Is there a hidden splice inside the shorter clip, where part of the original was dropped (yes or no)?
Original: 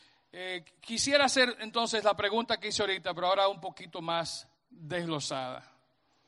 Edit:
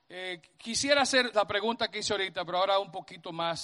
yes